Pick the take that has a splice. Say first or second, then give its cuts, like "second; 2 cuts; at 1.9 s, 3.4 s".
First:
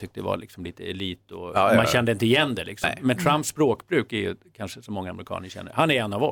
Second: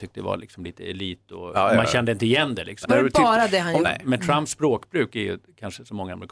second; 2 cuts; at 2.8 s, 3.8 s